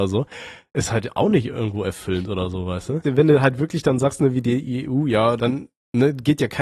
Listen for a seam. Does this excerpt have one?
yes; 2 cuts; at 3.0 s, 5.4 s

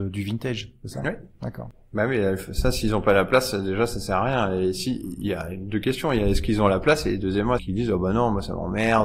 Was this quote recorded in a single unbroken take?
no; 1 cut; at 7.6 s

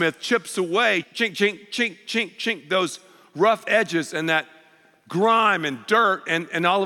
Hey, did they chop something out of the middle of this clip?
yes; 1 cut; at 1.0 s

